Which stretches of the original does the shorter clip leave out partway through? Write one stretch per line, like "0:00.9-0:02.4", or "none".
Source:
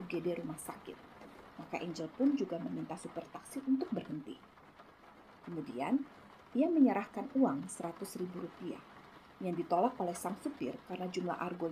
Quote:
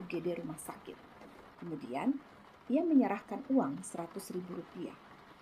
0:01.5-0:05.4